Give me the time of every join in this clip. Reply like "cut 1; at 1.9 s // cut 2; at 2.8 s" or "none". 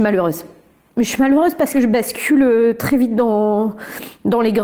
none